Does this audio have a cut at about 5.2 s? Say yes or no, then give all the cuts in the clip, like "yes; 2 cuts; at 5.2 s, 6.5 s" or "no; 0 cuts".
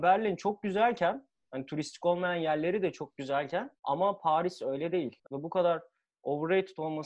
yes; 1 cut; at 5.2 s